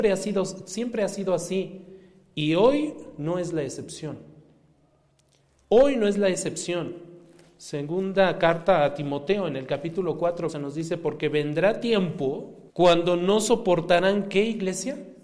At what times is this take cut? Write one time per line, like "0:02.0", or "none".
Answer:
0:10.5
0:12.7